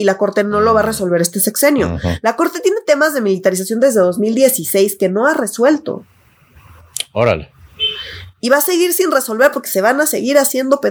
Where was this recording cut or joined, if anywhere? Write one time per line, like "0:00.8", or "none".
none